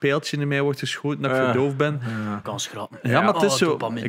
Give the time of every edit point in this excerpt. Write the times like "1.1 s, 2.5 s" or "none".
2.4 s